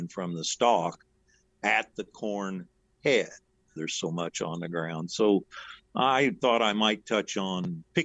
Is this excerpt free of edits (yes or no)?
no